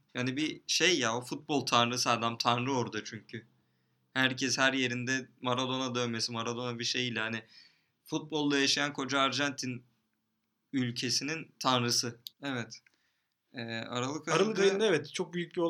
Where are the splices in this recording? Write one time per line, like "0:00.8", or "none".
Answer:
0:12.3